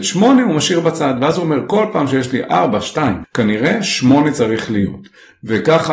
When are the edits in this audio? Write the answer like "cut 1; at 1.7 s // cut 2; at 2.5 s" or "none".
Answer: cut 1; at 3.2 s